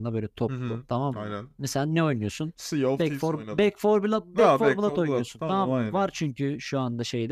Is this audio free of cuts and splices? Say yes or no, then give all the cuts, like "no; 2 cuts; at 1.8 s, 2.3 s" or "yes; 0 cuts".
yes; 0 cuts